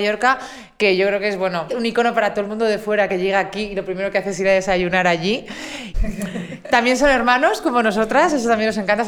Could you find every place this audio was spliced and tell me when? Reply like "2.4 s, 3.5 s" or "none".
1.7 s, 5.9 s